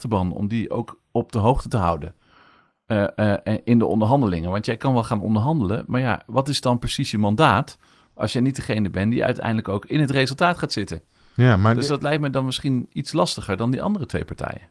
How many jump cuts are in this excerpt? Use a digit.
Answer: 0